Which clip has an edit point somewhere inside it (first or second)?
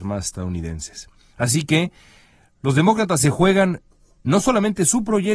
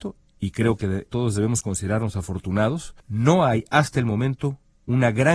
second